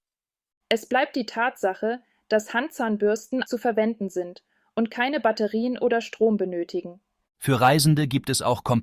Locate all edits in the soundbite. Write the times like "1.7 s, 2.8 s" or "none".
3.4 s, 7.2 s